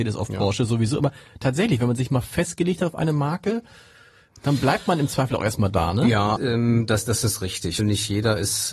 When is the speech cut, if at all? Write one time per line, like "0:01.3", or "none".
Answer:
0:06.4
0:07.8